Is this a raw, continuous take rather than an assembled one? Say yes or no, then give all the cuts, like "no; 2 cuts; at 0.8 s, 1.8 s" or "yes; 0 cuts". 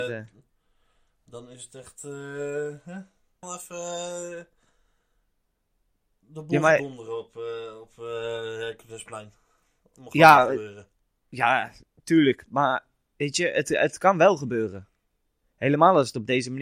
no; 1 cut; at 3.4 s